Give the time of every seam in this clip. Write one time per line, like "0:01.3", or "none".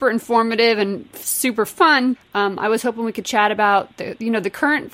0:02.1